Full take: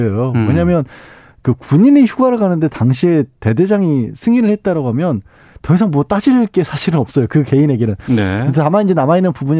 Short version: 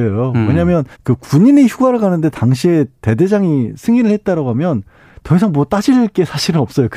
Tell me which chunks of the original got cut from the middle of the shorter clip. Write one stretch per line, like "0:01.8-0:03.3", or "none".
0:00.9-0:01.3